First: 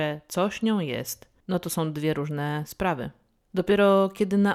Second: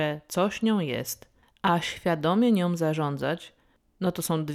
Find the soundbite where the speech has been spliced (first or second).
first